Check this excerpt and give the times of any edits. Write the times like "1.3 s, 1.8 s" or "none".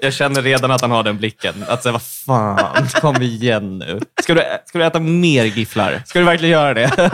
none